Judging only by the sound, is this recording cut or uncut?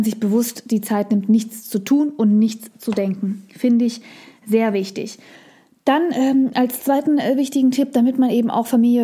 uncut